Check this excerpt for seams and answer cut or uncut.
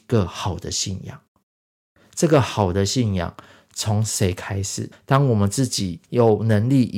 cut